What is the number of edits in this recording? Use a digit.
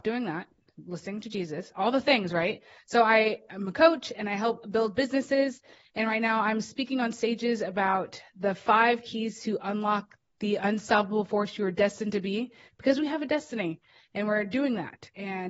0